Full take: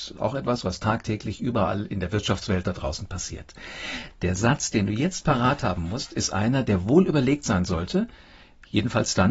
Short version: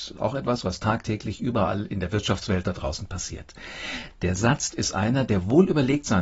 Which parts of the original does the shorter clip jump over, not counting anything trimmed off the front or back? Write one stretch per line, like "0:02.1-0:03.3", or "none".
0:04.7-0:06.1